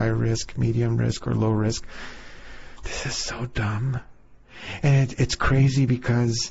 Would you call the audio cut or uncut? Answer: uncut